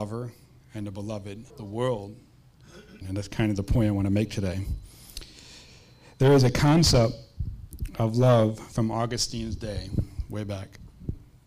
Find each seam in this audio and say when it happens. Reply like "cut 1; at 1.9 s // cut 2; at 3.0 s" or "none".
cut 1; at 1.5 s // cut 2; at 3.0 s